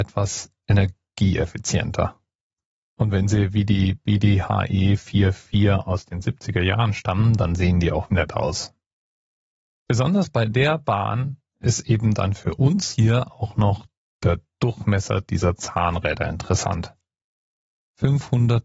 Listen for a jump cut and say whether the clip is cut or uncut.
cut